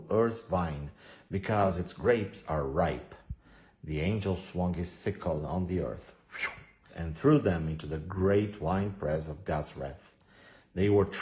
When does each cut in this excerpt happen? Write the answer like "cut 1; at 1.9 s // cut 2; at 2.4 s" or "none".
cut 1; at 6.9 s